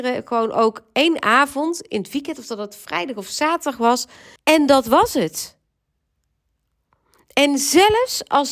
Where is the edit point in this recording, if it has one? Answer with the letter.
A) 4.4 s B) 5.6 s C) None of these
A